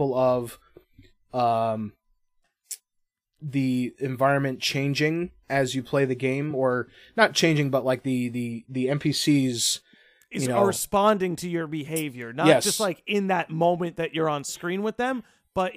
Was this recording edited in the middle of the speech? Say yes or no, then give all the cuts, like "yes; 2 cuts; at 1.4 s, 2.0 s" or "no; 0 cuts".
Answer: no; 0 cuts